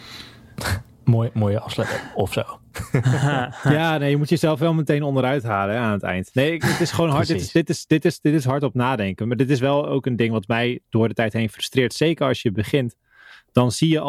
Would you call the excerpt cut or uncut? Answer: uncut